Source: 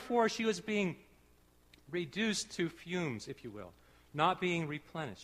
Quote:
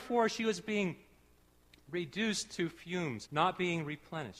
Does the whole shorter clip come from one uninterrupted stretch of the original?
no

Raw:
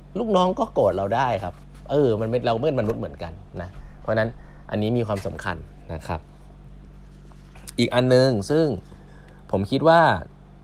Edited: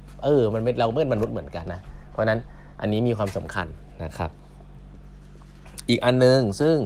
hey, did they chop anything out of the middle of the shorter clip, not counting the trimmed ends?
yes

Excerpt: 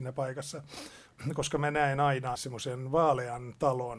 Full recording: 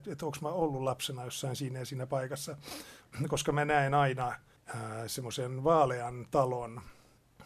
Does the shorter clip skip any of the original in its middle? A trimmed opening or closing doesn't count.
yes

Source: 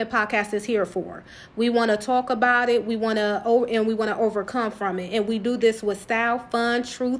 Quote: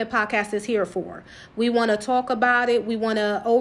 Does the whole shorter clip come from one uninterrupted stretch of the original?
yes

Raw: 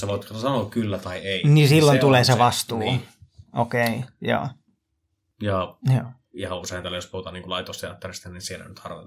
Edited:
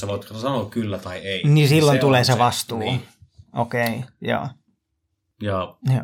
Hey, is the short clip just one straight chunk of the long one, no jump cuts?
yes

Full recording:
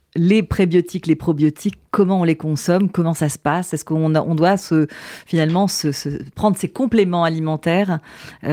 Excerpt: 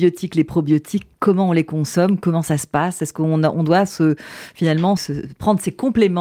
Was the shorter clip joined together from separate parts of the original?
yes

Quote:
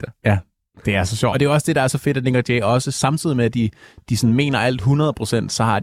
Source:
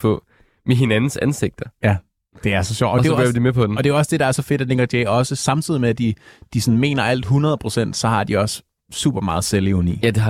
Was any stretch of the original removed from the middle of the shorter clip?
yes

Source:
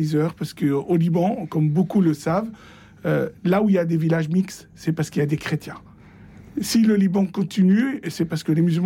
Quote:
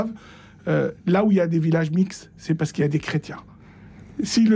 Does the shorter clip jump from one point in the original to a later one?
no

